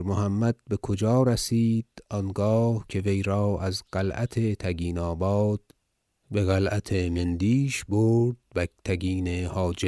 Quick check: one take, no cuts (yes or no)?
yes